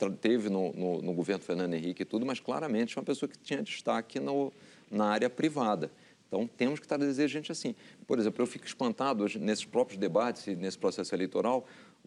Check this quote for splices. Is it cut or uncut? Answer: uncut